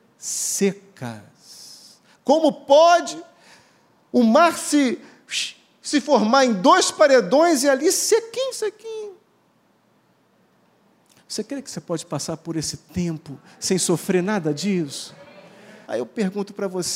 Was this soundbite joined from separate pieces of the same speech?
yes; 2 cuts; at 8.5 s, 15.8 s

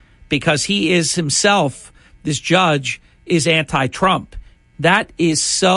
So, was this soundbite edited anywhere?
yes; 1 cut; at 4.7 s

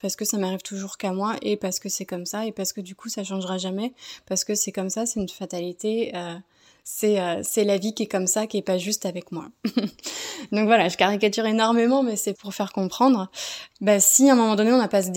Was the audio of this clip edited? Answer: yes; 2 cuts; at 12.4 s, 13.7 s

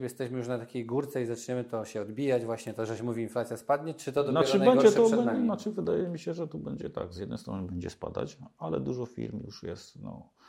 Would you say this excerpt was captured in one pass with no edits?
yes; 0 cuts

